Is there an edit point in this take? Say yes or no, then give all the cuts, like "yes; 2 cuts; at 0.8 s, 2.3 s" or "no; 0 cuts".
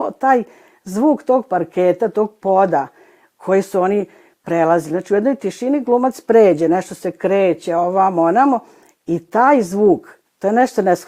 no; 0 cuts